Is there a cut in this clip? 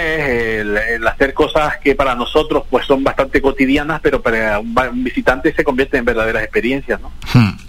no; 0 cuts

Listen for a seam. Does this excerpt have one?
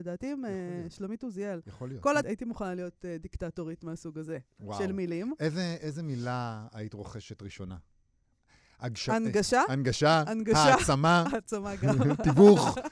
yes; 1 cut; at 2.2 s

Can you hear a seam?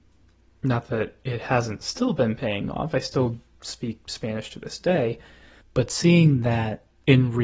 no; 0 cuts

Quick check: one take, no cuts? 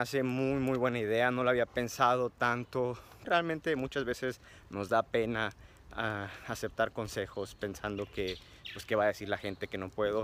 no; 1 cut; at 3.2 s

